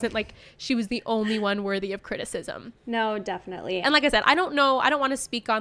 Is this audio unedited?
no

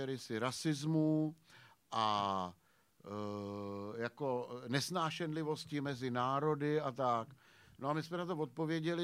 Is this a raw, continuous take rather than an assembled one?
yes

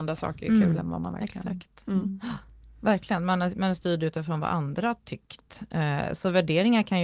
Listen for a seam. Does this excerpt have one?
no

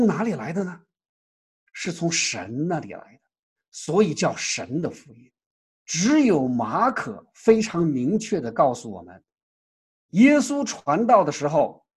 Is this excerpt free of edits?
no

